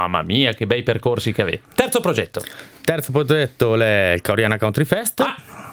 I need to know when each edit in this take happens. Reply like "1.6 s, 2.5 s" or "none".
1.6 s